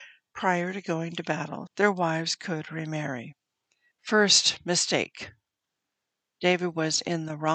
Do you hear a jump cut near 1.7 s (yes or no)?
yes